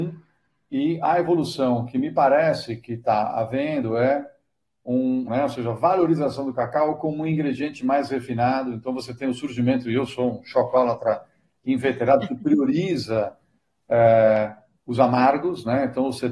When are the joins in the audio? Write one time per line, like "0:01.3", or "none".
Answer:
0:05.3